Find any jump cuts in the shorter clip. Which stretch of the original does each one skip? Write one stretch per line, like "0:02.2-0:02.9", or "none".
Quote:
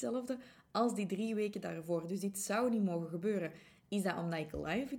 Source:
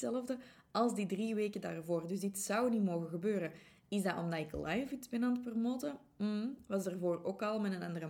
none